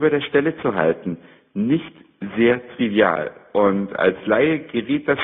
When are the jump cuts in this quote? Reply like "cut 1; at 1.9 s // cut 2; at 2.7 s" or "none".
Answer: none